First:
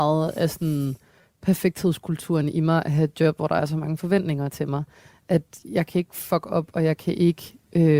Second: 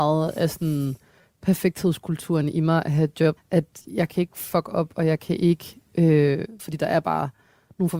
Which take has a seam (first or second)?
second